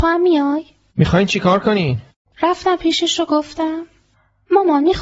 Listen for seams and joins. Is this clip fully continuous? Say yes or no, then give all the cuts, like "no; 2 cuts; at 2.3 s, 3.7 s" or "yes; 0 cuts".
no; 1 cut; at 2.3 s